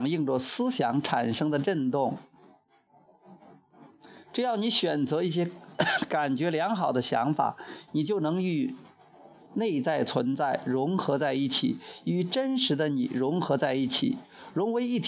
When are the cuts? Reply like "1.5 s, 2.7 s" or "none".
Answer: 7.9 s